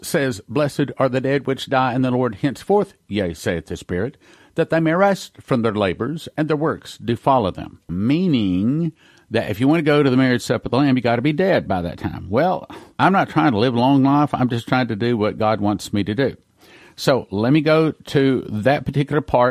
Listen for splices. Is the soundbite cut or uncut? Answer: uncut